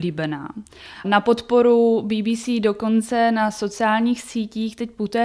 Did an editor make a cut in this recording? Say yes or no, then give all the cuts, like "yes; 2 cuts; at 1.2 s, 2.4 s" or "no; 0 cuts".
yes; 1 cut; at 1.0 s